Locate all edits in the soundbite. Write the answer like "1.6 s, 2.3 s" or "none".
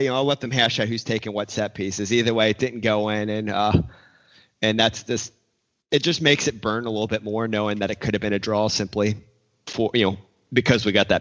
none